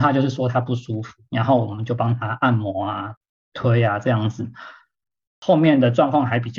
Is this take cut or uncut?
uncut